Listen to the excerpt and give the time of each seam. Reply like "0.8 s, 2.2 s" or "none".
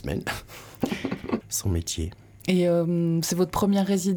1.4 s